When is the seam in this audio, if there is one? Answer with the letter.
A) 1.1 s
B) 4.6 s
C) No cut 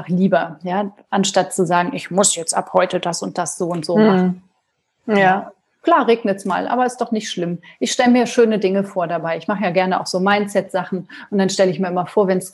C